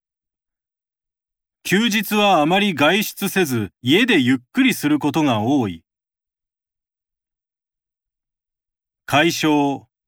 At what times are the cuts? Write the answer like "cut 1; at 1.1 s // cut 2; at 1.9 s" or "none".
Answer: cut 1; at 1.5 s // cut 2; at 3.8 s

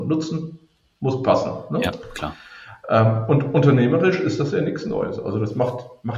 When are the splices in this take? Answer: none

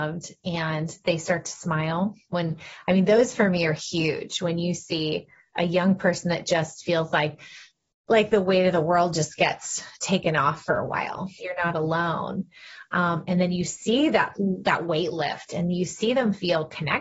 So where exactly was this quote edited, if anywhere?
cut 1; at 11.4 s // cut 2; at 14.3 s

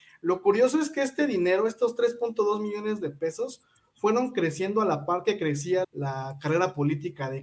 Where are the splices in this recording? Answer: cut 1; at 5.8 s

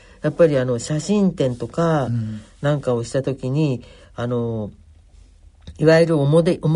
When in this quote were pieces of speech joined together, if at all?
none

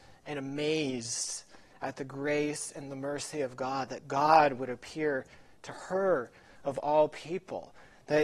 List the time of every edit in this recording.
none

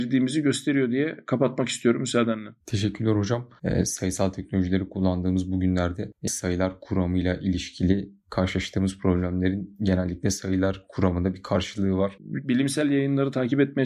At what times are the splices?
cut 1; at 3.6 s // cut 2; at 6.3 s // cut 3; at 12.2 s

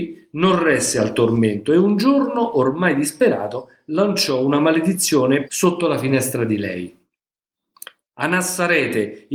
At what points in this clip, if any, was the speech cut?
cut 1; at 5.5 s

